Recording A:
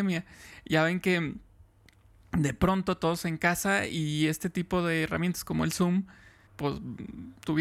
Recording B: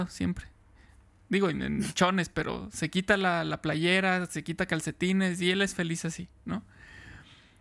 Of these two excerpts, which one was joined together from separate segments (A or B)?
A